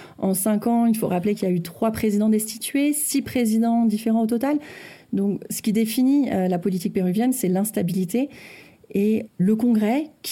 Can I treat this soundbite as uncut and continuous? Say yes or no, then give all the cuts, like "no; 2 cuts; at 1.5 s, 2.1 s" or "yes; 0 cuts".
yes; 0 cuts